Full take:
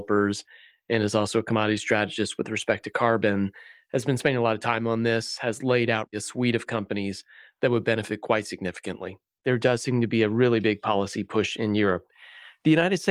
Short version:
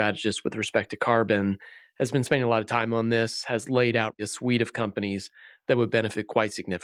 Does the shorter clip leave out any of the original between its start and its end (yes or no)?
no